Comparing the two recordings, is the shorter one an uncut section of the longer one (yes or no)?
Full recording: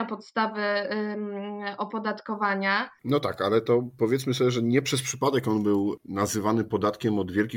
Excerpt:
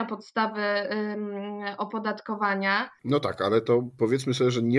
yes